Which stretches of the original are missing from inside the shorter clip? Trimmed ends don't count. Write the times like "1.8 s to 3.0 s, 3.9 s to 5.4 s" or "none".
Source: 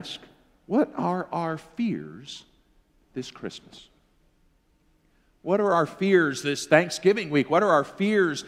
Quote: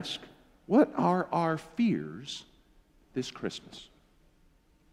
none